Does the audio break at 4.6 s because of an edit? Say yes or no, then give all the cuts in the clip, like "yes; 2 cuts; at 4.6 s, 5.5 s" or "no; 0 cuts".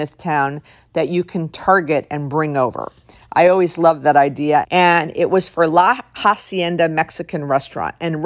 yes; 1 cut; at 4.6 s